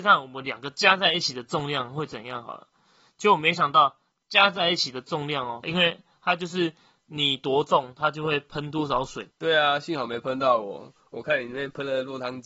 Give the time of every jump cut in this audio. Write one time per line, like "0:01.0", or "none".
0:05.6
0:09.3